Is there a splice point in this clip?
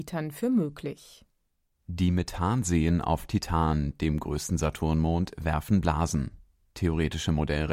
no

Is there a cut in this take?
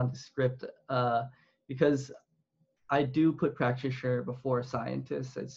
no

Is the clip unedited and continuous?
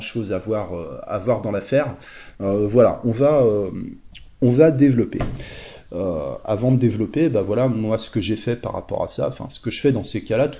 yes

